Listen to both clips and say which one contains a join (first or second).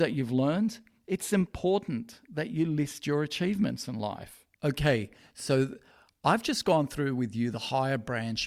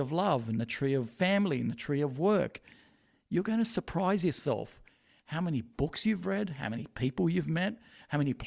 first